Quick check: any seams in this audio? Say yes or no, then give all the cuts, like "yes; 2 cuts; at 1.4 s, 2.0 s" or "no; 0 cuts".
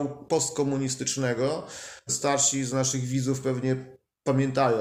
yes; 1 cut; at 2.1 s